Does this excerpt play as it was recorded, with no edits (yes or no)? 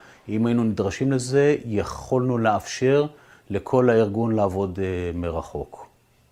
yes